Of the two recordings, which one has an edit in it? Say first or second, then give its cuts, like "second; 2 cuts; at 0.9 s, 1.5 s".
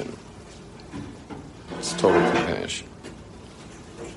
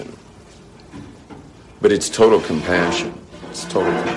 first; 1 cut; at 1.7 s